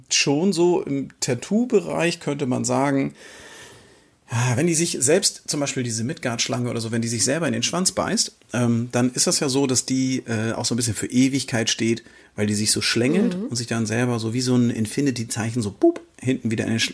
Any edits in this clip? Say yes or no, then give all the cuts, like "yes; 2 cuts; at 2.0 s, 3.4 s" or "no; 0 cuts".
no; 0 cuts